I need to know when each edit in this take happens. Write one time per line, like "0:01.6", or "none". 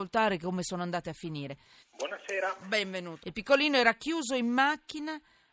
0:01.8
0:03.2